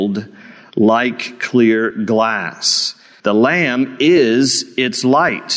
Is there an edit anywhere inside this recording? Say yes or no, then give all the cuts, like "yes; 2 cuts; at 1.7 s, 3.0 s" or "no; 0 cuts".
yes; 1 cut; at 3.2 s